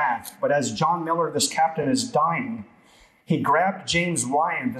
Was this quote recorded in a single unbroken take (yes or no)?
yes